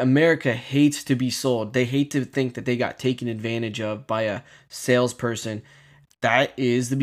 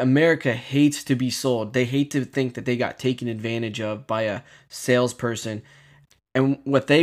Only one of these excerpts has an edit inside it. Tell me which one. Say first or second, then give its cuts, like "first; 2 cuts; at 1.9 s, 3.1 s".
first; 1 cut; at 6.1 s